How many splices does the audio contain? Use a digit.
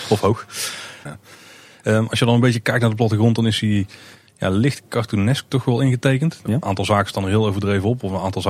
2